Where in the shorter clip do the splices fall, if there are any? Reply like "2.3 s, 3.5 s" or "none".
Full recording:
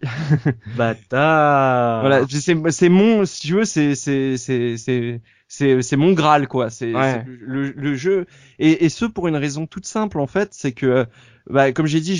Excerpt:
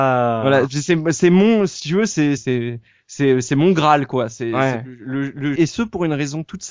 2.4 s, 5.6 s